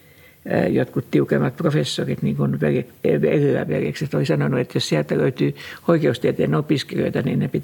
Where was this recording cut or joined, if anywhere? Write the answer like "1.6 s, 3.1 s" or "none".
none